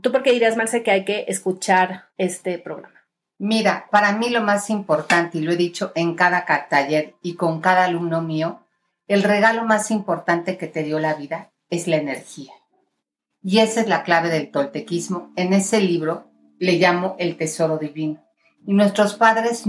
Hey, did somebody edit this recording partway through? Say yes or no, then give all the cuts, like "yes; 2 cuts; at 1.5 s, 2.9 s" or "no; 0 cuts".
no; 0 cuts